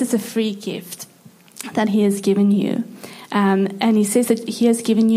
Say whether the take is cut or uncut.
uncut